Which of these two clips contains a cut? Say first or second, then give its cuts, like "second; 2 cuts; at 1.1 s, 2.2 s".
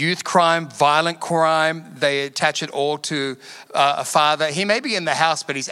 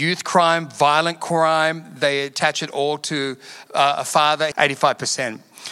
second; 1 cut; at 4.5 s